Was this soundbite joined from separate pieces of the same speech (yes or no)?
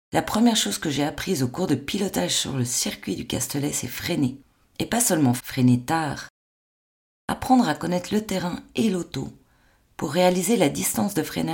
yes